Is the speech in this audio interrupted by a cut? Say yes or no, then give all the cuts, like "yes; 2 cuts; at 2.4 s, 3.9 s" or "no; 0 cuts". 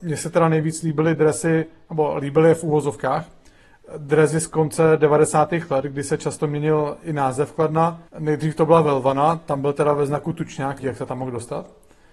yes; 2 cuts; at 8.1 s, 10.8 s